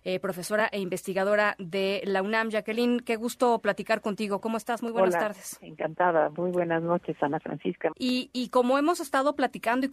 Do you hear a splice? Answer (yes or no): yes